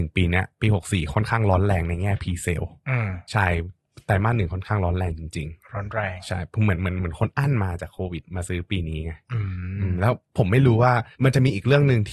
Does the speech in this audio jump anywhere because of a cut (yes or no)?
yes